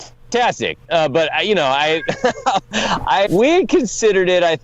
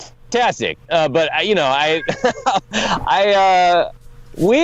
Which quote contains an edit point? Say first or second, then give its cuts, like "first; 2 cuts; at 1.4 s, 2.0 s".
first; 1 cut; at 3.3 s